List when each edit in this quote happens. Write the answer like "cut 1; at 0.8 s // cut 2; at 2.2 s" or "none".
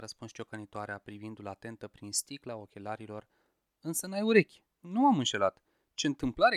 cut 1; at 4.7 s